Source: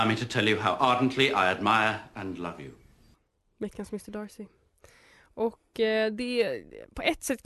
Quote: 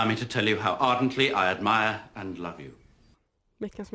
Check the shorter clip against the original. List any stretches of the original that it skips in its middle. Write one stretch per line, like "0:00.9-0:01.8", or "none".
none